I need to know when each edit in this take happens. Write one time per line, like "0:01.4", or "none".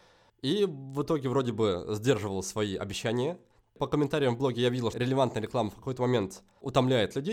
0:04.9

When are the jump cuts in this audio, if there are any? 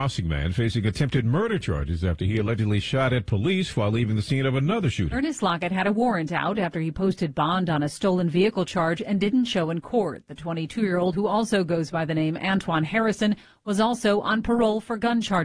none

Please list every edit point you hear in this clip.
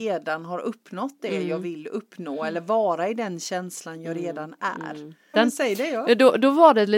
0:05.3

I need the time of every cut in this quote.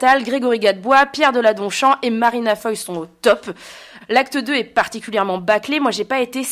0:04.0

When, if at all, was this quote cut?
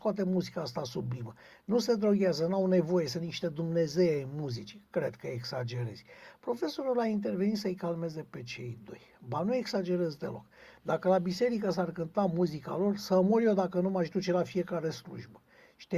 none

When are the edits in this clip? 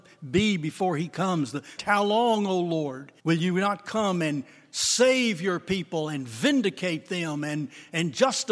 0:01.8
0:03.2

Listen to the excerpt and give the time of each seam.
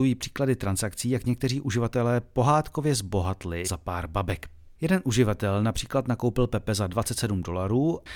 0:03.6

